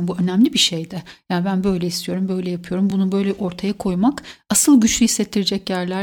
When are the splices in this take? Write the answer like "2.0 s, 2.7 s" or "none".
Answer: none